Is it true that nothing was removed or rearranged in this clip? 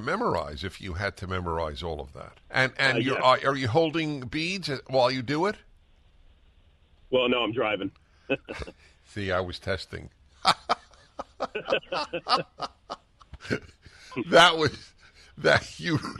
no; 1 cut; at 2.4 s

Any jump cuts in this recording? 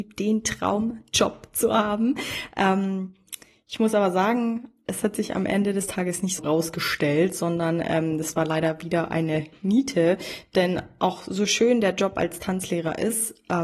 yes; 1 cut; at 6.4 s

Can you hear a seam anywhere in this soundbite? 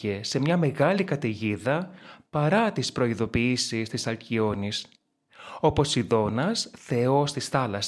no; 0 cuts

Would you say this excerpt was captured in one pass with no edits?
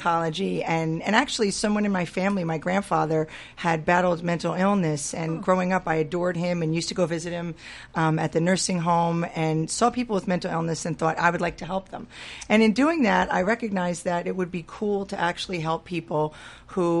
yes; 0 cuts

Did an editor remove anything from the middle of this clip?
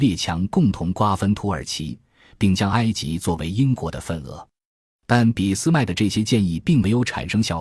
no; 0 cuts

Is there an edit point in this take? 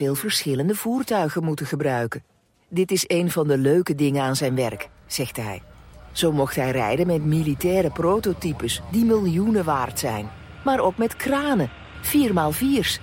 no; 0 cuts

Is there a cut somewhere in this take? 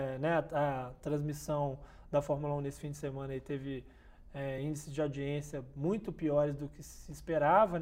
no; 0 cuts

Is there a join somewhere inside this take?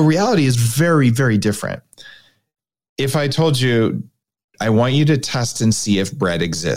no; 0 cuts

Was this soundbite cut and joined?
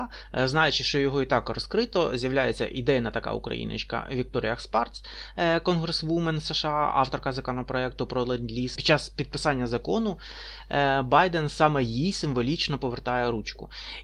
no; 0 cuts

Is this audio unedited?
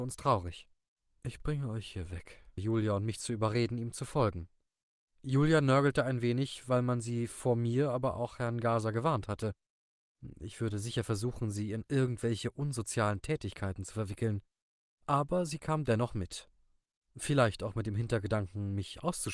no; 1 cut; at 2.6 s

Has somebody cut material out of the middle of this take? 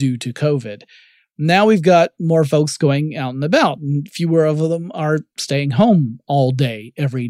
no; 0 cuts

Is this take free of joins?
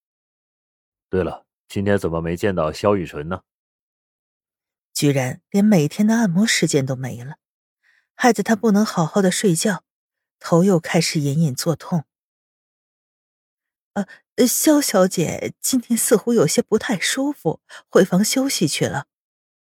yes; 0 cuts

